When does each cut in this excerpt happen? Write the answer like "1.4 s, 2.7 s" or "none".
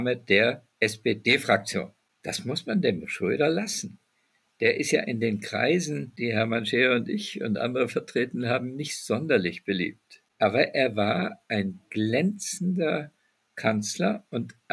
none